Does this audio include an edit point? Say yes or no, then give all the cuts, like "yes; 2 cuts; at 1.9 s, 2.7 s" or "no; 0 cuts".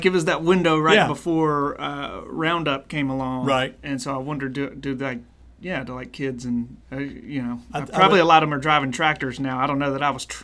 yes; 1 cut; at 6.8 s